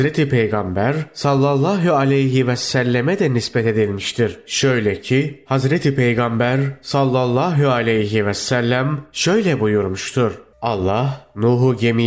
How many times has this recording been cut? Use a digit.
1